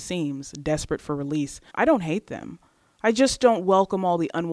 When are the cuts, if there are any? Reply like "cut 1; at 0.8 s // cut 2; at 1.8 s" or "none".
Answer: cut 1; at 1.7 s